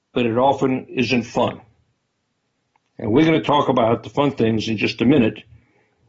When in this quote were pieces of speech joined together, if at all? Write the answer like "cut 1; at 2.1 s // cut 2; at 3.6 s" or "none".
none